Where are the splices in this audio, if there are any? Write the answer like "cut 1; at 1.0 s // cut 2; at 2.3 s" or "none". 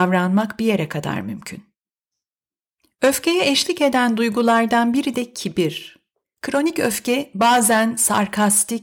cut 1; at 6.2 s